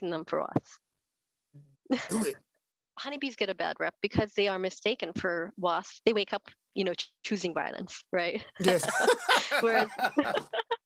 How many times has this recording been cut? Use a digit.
1